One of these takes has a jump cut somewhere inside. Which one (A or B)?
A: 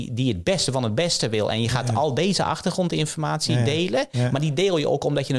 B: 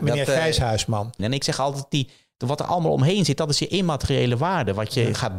B